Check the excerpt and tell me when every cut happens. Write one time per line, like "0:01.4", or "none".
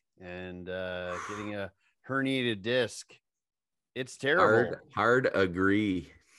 none